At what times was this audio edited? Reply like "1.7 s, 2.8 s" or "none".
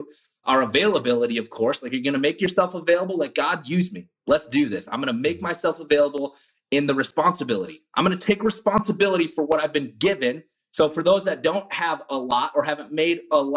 none